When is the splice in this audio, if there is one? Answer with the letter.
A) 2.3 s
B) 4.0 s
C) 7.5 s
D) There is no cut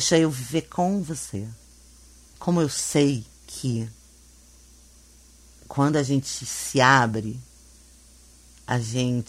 A